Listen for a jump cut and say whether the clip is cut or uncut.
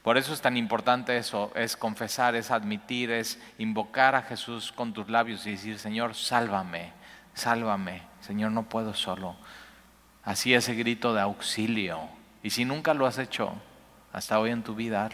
uncut